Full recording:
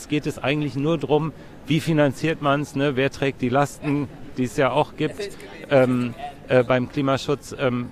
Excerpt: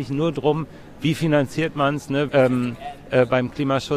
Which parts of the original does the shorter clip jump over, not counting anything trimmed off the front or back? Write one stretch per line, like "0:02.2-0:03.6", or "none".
0:02.9-0:05.7